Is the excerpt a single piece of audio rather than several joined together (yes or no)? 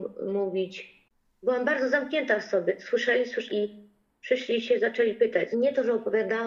no